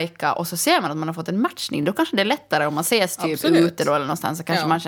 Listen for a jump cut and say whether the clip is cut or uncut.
uncut